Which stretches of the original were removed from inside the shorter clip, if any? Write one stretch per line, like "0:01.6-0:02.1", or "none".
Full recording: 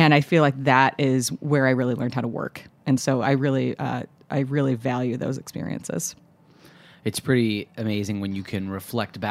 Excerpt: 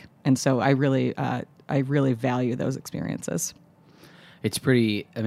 none